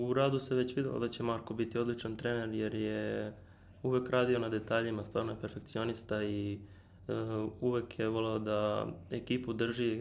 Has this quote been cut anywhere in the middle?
no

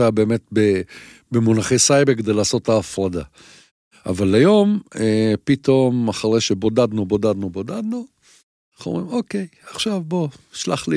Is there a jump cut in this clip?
no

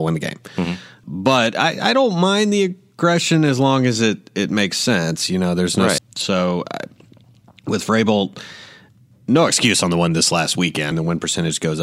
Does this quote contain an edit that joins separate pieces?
yes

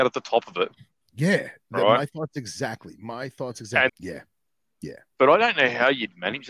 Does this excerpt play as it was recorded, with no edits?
no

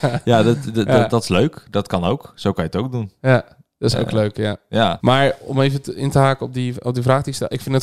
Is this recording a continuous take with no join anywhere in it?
no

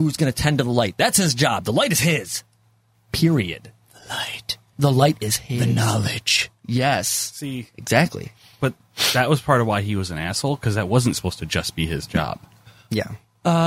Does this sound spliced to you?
no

